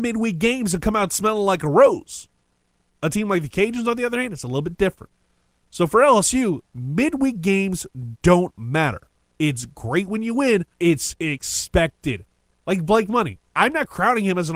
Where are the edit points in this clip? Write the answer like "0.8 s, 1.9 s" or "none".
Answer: 9.3 s, 10.7 s